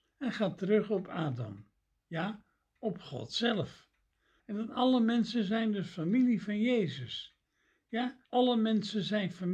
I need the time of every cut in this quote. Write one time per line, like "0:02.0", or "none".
0:04.4
0:08.2